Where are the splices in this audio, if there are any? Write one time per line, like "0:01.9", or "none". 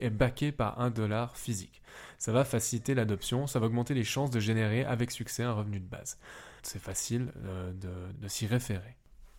0:06.6
0:08.1